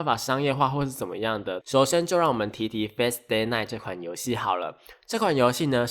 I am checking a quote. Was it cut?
yes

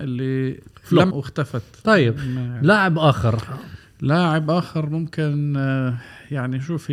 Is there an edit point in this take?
yes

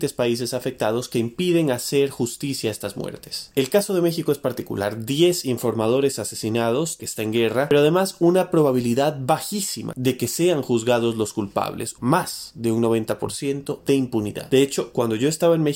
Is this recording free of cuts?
no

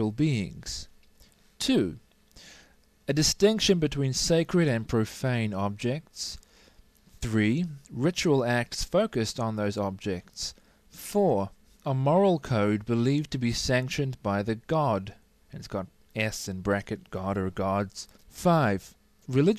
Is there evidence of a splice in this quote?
yes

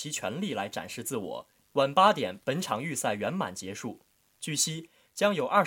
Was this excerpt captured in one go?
no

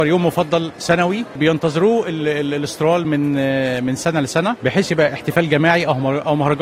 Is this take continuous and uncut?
yes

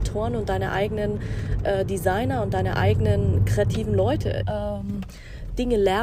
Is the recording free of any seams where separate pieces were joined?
no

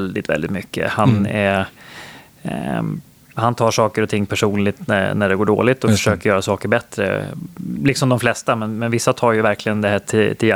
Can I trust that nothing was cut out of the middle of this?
yes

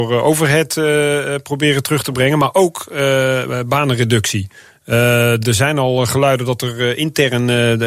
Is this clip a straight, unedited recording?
yes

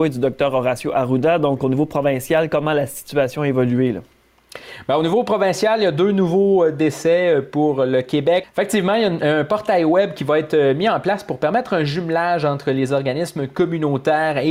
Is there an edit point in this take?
yes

